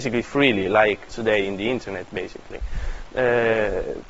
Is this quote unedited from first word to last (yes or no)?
no